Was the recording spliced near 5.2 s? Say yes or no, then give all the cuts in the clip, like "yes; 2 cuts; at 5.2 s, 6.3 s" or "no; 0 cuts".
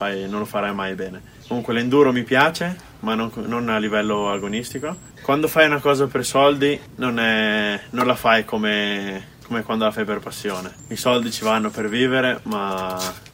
yes; 1 cut; at 5.2 s